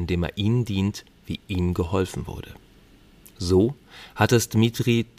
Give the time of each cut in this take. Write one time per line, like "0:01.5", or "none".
none